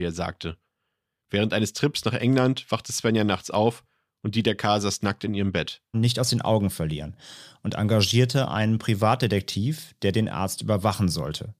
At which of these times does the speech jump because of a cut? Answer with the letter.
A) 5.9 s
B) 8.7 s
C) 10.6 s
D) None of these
A